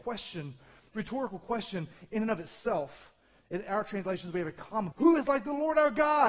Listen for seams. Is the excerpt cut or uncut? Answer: cut